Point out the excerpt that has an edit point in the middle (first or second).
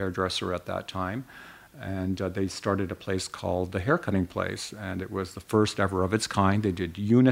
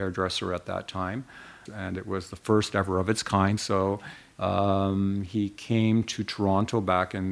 second